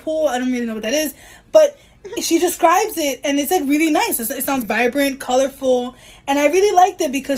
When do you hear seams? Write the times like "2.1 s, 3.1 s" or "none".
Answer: 4.6 s